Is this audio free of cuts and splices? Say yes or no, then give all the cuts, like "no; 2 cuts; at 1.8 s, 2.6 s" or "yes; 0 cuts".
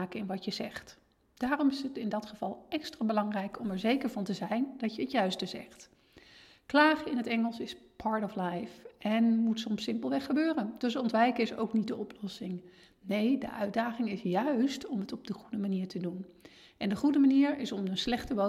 yes; 0 cuts